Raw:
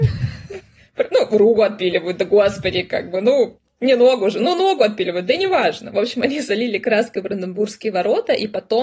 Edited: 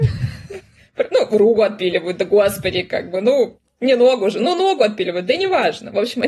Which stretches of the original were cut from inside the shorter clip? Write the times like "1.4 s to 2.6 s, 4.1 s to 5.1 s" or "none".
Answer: none